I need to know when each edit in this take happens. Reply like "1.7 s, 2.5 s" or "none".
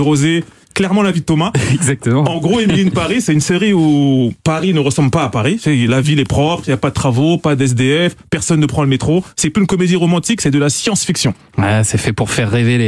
none